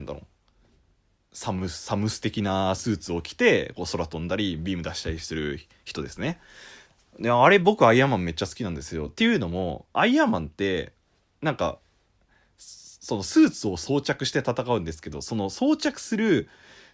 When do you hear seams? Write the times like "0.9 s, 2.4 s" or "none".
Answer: none